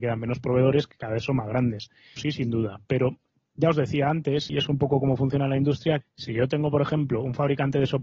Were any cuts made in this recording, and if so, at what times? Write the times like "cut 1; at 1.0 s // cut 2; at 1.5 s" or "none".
cut 1; at 2.2 s // cut 2; at 4.5 s // cut 3; at 6.0 s